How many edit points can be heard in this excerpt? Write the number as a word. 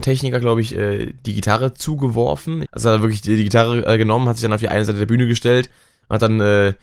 one